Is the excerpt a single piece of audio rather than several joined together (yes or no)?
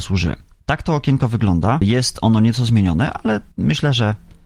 no